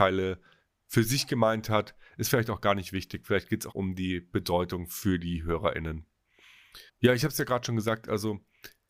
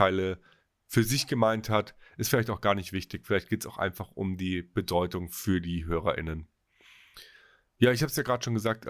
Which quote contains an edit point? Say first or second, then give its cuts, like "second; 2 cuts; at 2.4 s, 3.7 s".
first; 2 cuts; at 3.7 s, 6.9 s